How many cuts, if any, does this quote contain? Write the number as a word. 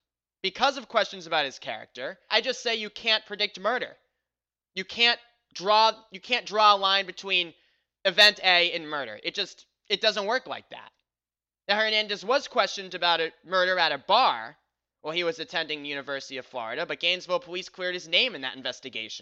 one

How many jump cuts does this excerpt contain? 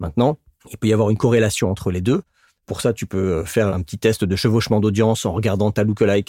one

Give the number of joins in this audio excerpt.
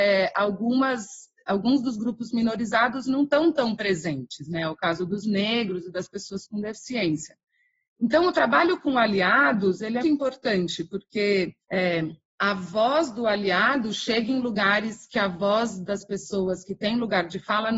two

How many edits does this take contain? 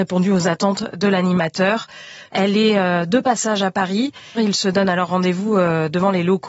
two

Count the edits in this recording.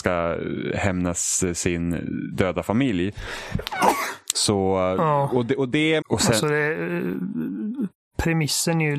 two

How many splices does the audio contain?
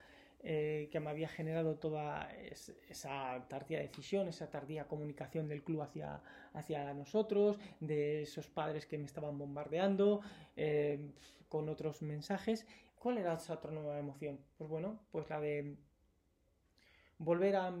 one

